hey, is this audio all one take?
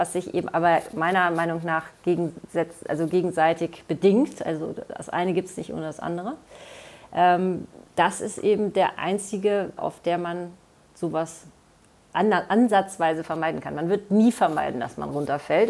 no; 2 cuts; at 7.9 s, 9.8 s

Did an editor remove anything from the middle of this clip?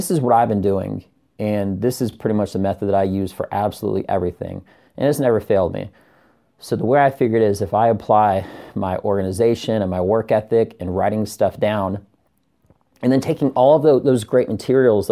no; 0 cuts

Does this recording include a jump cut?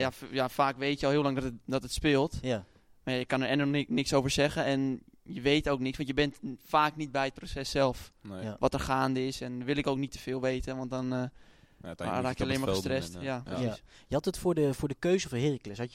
no; 0 cuts

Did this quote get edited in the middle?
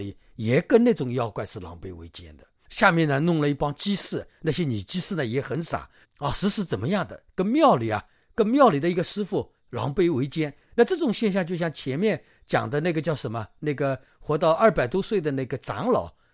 yes; 1 cut; at 6.0 s

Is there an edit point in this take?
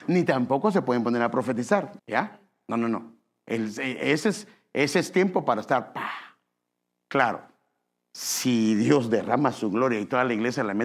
yes; 1 cut; at 2.0 s

